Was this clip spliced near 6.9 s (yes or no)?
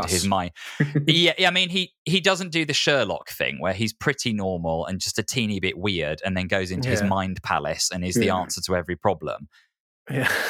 no